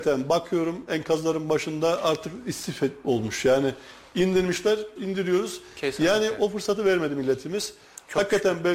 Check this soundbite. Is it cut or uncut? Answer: cut